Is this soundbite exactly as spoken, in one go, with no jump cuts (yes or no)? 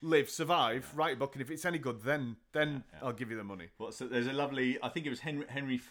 yes